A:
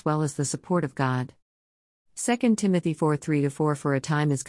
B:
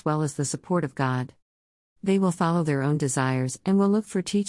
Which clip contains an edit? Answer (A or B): B